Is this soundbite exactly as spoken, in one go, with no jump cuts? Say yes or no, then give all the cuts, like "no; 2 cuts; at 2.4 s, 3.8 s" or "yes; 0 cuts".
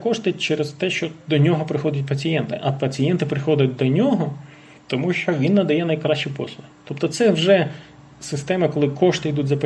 yes; 0 cuts